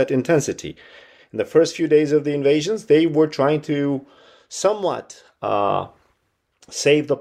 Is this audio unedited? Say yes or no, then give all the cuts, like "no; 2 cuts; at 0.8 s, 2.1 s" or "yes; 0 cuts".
yes; 0 cuts